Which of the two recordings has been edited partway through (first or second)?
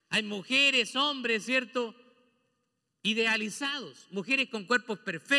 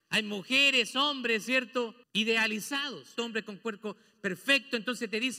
second